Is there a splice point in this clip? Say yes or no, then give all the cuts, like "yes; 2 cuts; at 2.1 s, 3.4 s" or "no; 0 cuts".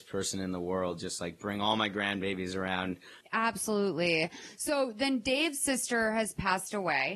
yes; 1 cut; at 3.2 s